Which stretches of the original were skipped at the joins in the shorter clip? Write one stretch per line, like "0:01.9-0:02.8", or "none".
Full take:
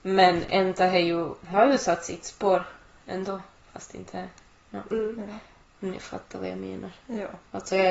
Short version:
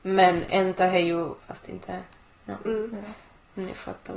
0:01.4-0:03.6

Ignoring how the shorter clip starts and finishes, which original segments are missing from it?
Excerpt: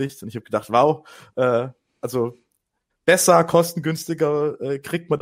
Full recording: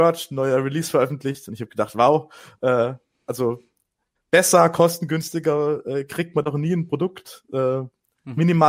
none

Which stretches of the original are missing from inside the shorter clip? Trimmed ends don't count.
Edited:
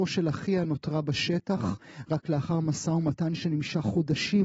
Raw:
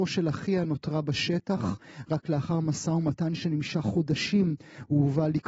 none

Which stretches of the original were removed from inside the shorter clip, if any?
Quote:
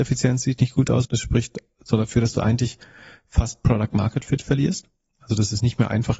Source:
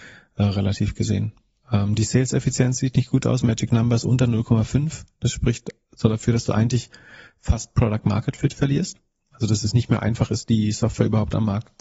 0:03.4-0:05.2

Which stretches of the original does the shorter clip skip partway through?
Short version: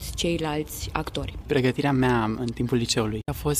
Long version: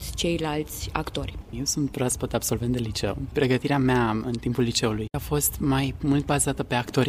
0:01.4-0:03.3

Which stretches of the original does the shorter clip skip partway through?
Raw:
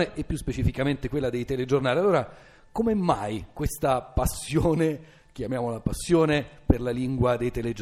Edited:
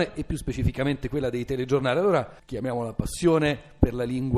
0:02.4-0:05.3

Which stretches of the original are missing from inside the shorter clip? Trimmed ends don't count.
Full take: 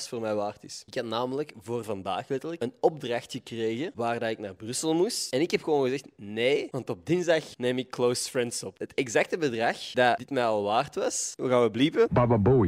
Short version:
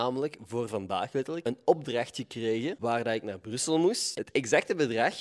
0:05.3-0:08.8

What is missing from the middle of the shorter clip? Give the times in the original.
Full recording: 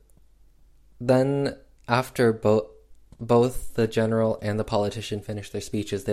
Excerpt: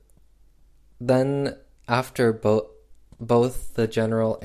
none

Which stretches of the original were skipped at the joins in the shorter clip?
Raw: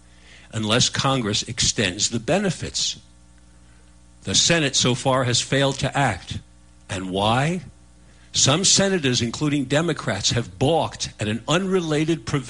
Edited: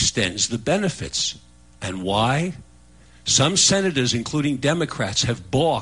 0:03.3-0:06.7

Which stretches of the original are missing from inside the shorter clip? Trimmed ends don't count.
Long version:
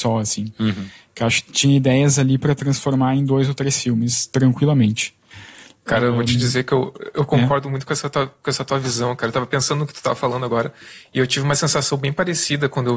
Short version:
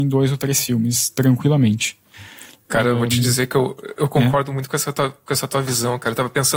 none

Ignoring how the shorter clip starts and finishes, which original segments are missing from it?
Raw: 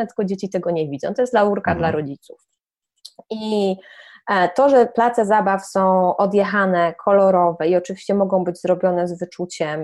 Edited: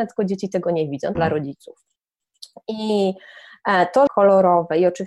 0:01.2-0:01.8
0:04.7-0:07.0

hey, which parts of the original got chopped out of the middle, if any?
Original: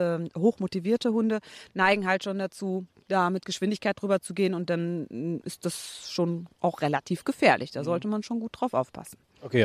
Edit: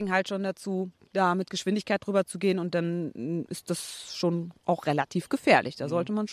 none

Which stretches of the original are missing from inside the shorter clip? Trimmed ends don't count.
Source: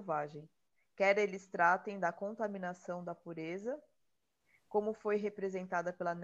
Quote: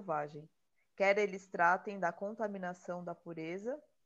none

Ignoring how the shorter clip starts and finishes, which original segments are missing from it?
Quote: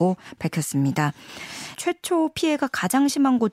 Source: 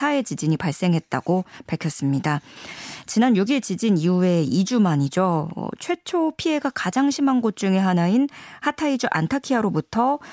0:03.0-0:05.8

